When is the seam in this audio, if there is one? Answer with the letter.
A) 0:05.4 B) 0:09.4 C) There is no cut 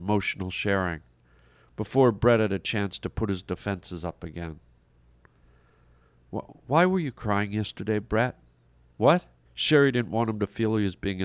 B